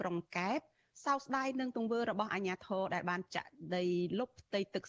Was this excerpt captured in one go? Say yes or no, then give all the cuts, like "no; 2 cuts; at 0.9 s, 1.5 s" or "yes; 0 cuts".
yes; 0 cuts